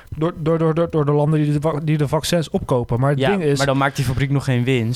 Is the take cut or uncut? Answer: uncut